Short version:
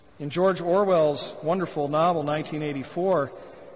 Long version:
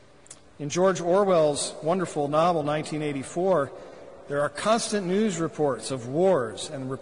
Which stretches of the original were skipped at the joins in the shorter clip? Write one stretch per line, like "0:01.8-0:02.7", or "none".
none